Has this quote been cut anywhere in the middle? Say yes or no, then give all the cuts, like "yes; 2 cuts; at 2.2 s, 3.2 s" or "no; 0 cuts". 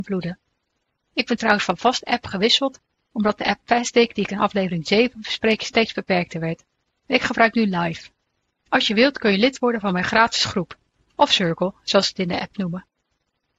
no; 0 cuts